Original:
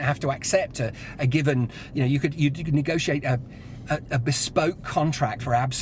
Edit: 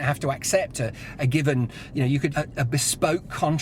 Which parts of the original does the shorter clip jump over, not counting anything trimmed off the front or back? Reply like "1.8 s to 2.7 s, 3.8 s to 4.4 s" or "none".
2.3 s to 3.9 s